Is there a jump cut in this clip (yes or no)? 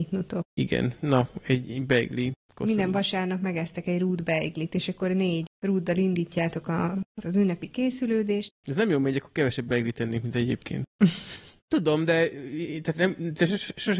yes